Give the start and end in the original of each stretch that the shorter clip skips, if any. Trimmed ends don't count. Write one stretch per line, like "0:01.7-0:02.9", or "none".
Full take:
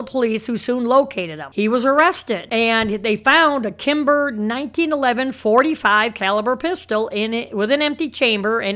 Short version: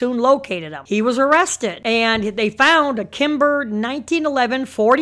none